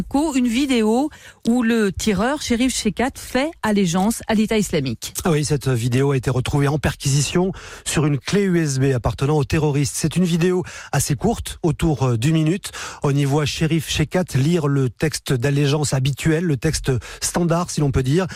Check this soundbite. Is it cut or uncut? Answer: uncut